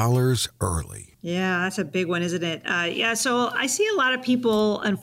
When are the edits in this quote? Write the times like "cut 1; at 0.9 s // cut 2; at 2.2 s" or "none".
cut 1; at 1.1 s